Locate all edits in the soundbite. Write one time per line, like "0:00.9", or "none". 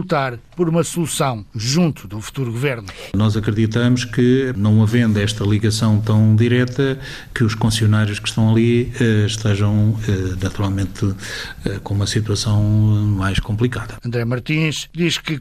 0:03.1